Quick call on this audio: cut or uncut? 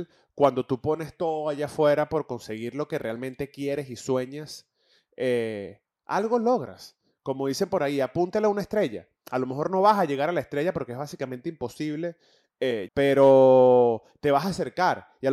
cut